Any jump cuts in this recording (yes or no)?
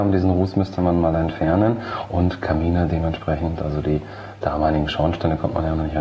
no